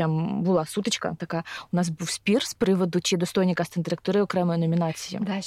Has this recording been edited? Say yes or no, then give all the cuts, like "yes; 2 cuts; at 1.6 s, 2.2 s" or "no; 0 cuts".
no; 0 cuts